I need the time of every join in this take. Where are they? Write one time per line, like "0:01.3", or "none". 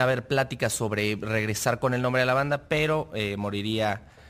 none